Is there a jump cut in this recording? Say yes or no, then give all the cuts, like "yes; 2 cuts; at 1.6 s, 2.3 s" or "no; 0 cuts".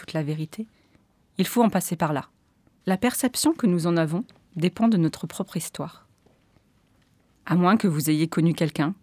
yes; 2 cuts; at 2.8 s, 7.3 s